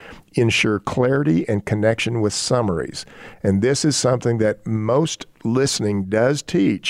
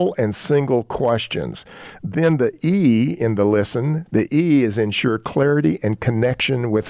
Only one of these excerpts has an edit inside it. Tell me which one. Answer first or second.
second